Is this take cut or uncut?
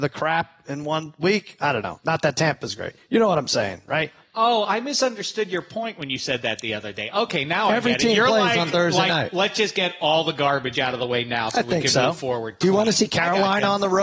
uncut